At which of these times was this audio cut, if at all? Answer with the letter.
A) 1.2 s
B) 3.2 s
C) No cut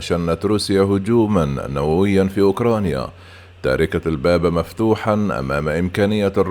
C